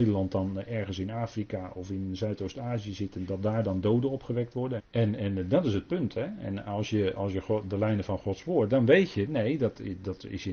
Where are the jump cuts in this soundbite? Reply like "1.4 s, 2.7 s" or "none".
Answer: 4.8 s